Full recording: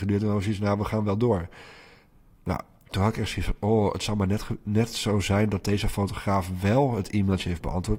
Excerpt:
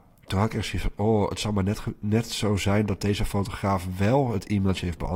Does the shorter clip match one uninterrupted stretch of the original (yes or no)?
yes